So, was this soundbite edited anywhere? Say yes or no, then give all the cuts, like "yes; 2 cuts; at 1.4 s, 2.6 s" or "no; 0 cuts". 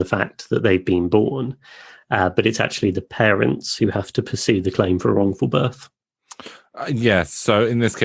no; 0 cuts